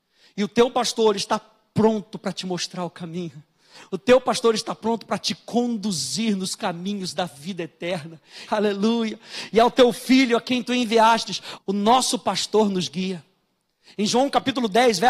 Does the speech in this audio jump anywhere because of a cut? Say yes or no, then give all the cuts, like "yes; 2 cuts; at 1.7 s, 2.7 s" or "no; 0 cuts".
yes; 2 cuts; at 8.5 s, 11.6 s